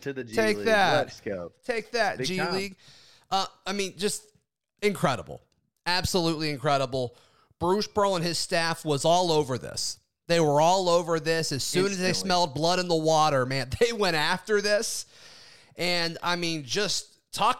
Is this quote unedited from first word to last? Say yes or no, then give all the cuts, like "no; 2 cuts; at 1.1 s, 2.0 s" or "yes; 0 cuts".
yes; 0 cuts